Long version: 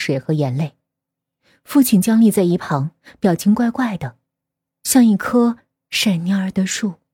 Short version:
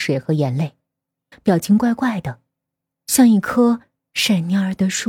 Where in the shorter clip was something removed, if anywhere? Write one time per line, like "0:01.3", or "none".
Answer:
0:01.3